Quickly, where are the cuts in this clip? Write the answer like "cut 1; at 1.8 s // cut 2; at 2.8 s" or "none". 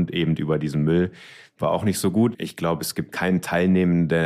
cut 1; at 2.3 s